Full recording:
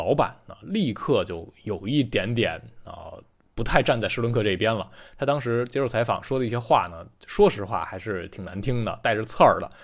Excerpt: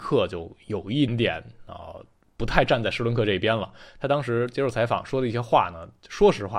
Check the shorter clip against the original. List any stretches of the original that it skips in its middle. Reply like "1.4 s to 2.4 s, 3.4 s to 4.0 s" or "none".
2.0 s to 2.3 s